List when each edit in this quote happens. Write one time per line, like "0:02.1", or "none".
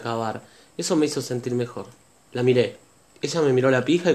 0:02.3